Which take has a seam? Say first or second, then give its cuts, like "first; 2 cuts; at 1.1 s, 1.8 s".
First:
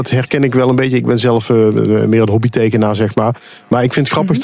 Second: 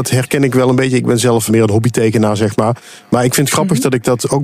second; 1 cut; at 1.5 s